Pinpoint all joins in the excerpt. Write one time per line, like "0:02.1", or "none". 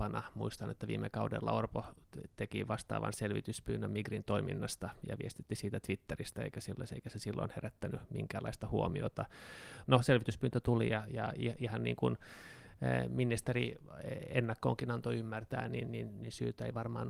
0:09.9